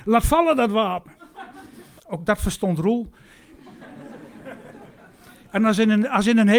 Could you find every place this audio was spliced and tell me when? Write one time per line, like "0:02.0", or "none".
0:02.0